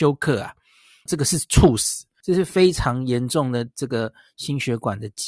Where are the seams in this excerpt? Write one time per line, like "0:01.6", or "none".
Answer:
0:01.1
0:02.2

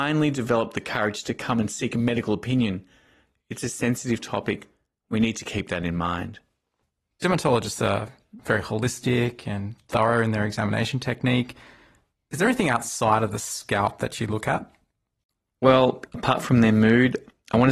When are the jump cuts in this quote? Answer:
0:16.1

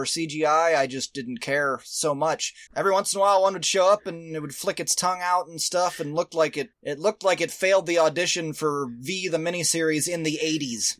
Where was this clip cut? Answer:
0:02.7
0:06.7

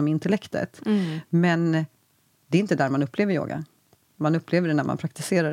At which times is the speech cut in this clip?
none

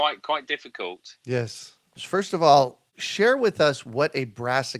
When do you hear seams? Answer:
0:02.0

